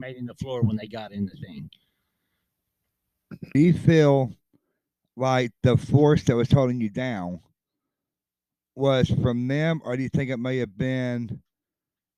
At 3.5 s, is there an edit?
yes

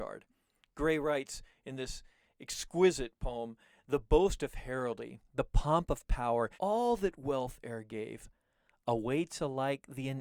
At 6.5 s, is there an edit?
yes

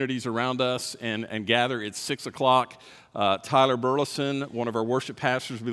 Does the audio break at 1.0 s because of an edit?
no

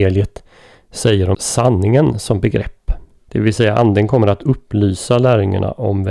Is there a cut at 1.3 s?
yes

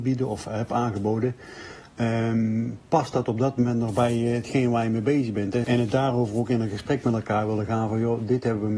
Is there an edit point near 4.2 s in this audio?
no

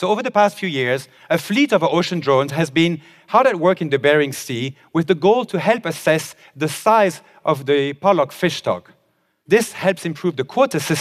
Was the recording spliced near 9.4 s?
no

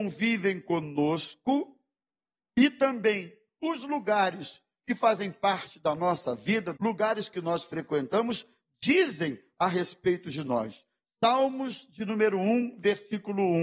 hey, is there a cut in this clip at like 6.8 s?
yes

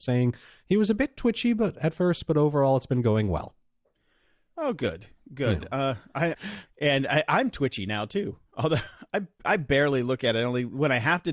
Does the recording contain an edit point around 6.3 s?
yes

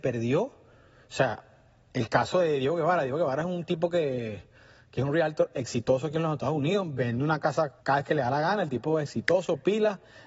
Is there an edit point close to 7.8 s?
yes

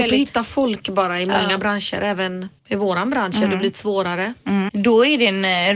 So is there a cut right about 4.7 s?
yes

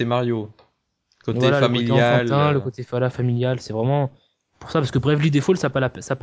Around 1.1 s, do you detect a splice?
no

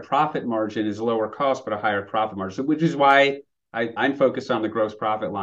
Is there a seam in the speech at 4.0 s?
yes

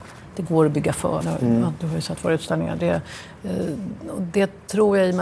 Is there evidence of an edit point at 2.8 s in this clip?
no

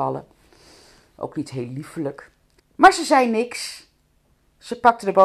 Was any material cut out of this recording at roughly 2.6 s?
yes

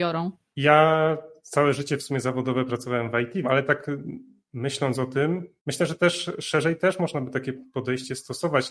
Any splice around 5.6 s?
yes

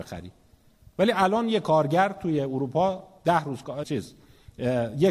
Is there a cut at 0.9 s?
no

